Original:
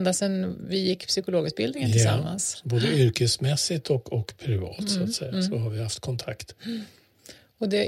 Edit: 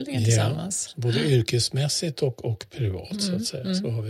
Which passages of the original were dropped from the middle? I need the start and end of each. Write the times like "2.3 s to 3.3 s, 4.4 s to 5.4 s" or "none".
none

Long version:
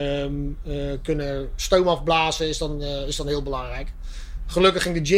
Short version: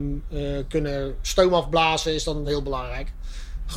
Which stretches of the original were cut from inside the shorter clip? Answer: 2.8 s to 3.2 s

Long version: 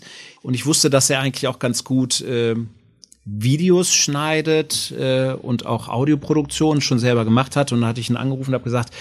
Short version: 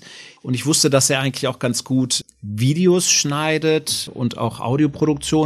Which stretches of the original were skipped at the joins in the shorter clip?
2.2 s to 3.0 s, 4.9 s to 5.4 s

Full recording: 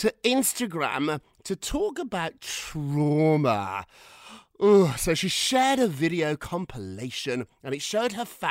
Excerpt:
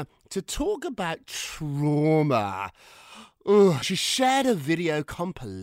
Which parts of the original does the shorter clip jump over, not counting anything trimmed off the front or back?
5.0 s to 5.1 s

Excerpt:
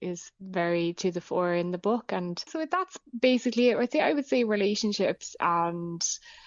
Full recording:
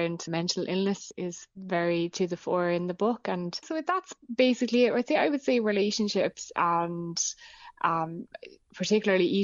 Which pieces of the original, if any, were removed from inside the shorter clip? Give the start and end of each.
none

